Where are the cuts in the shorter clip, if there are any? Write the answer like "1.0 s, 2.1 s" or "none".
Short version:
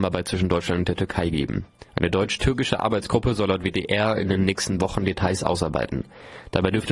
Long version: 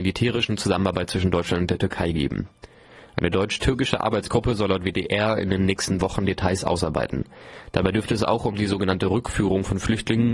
1.9 s